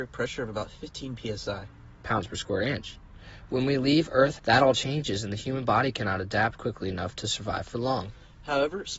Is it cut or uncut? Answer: cut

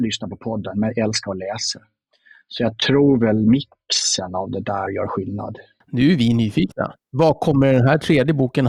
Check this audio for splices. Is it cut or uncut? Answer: uncut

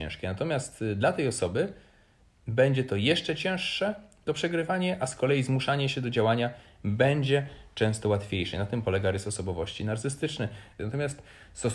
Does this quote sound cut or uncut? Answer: cut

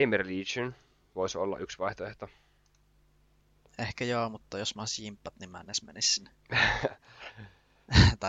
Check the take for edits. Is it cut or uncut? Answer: uncut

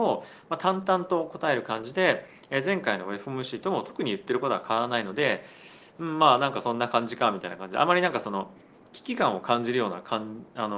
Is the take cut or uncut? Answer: uncut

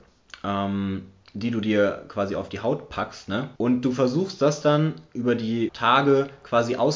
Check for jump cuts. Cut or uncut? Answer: cut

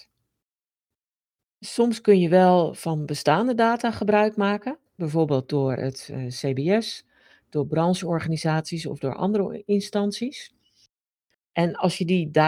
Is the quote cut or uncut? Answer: cut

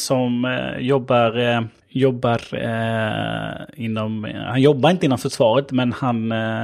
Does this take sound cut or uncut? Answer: uncut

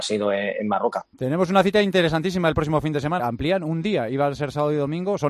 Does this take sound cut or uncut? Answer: cut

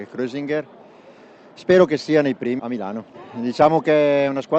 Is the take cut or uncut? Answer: cut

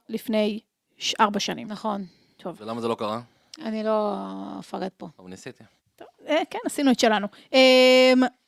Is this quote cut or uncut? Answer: uncut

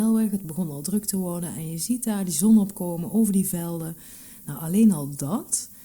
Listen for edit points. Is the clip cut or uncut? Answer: uncut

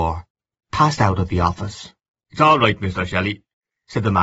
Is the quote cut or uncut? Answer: cut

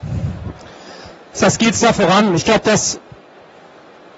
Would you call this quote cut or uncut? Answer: uncut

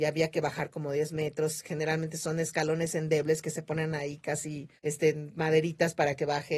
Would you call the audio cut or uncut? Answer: cut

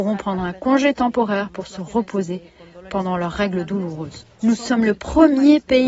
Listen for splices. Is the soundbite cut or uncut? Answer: cut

